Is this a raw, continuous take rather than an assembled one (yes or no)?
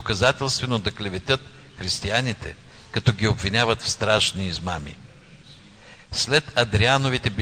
no